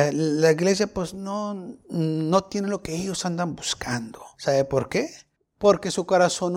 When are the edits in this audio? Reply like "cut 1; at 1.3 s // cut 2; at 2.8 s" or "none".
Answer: cut 1; at 1.8 s // cut 2; at 4.3 s